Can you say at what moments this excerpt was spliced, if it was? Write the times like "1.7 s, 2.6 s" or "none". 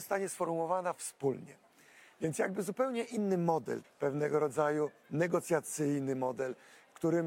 3.8 s